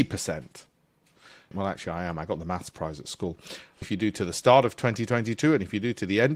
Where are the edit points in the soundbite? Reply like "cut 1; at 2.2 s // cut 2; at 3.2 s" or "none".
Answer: cut 1; at 1.5 s // cut 2; at 3.8 s